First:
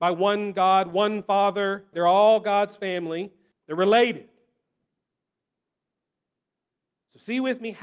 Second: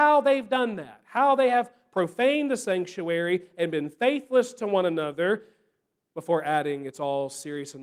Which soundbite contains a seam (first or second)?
first